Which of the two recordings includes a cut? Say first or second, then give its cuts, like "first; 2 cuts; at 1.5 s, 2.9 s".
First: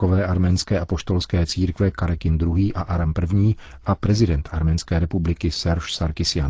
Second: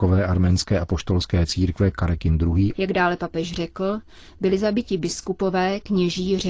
second; 1 cut; at 2.7 s